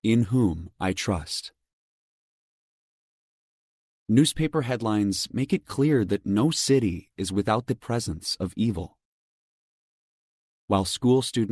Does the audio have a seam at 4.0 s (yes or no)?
no